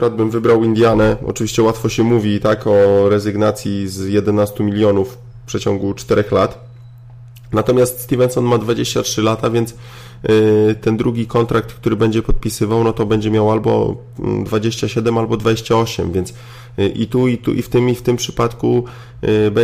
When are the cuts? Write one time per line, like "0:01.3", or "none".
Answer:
none